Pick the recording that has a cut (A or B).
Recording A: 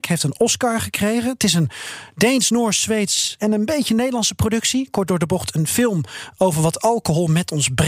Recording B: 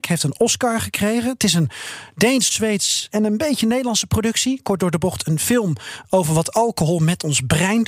B